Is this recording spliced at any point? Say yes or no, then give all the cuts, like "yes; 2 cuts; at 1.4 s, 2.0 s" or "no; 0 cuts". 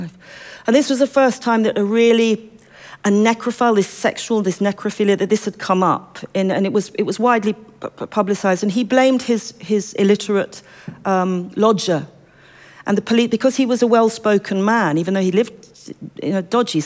no; 0 cuts